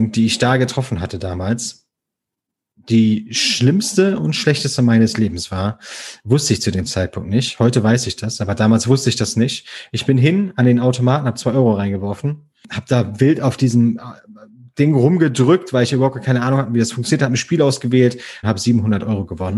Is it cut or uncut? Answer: cut